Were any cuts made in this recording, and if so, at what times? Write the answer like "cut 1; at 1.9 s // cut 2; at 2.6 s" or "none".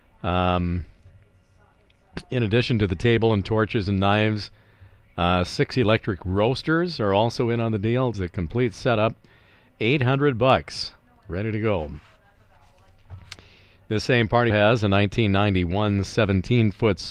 cut 1; at 8.1 s // cut 2; at 14.5 s